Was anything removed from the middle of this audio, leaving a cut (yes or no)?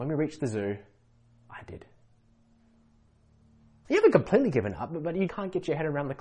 yes